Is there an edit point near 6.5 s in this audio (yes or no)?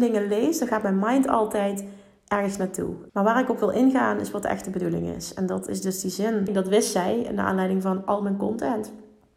yes